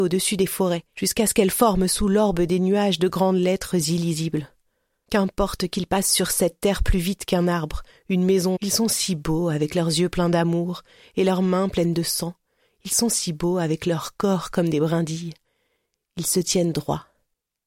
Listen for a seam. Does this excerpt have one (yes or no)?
yes